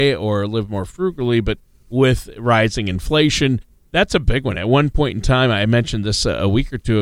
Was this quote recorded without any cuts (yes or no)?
yes